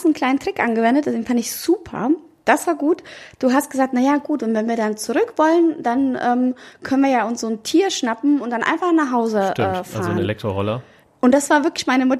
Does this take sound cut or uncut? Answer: uncut